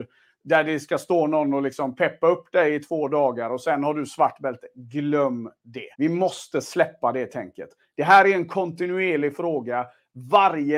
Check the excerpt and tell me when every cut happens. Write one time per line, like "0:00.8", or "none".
0:05.9